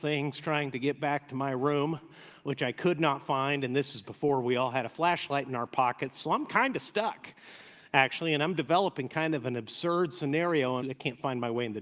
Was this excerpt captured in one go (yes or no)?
no